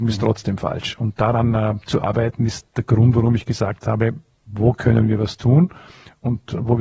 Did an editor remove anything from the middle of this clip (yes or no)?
no